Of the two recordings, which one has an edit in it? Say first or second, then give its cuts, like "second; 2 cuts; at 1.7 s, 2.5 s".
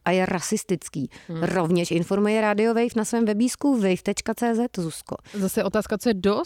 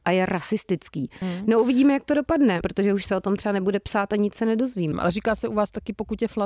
second; 3 cuts; at 1.2 s, 2.6 s, 4.9 s